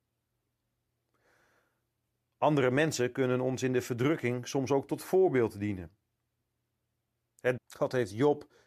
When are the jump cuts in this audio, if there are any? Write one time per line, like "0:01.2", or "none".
0:07.6